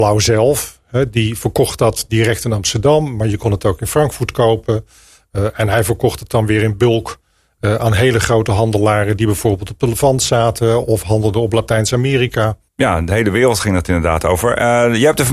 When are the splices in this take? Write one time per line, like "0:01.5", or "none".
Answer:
0:12.7

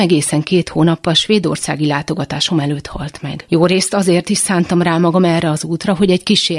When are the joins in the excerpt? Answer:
none

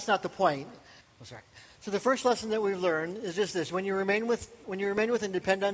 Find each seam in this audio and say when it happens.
0:01.0
0:04.6

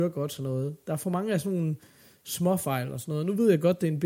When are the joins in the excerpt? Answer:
none

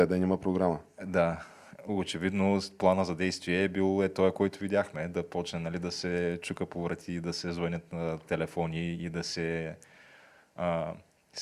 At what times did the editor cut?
none

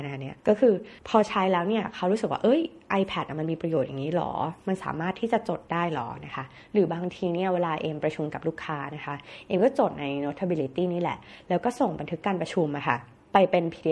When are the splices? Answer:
0:08.0

